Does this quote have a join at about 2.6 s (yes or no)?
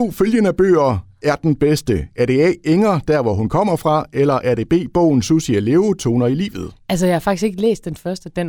no